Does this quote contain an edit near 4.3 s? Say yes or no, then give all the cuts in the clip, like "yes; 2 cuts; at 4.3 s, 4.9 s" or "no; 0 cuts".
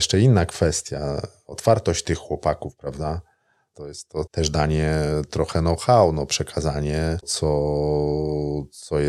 yes; 2 cuts; at 4.3 s, 7.2 s